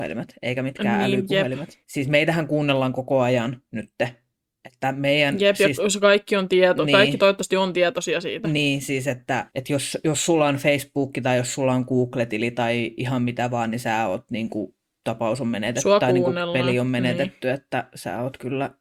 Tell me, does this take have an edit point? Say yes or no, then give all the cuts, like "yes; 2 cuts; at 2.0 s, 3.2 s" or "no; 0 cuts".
no; 0 cuts